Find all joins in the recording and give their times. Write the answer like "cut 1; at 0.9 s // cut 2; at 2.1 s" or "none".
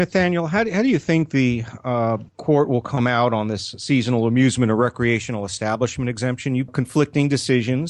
cut 1; at 2.3 s // cut 2; at 6.7 s